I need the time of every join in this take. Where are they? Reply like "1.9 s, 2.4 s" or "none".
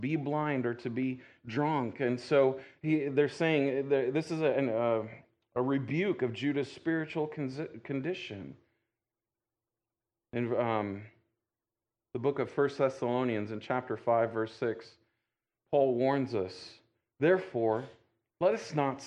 none